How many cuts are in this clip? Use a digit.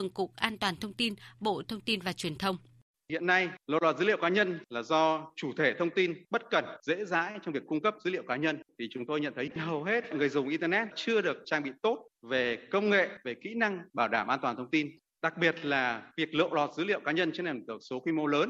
0